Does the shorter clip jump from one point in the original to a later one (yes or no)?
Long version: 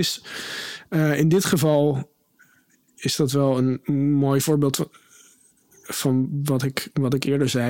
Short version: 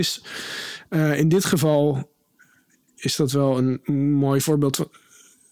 no